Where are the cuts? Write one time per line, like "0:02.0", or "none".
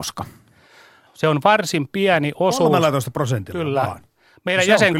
0:01.1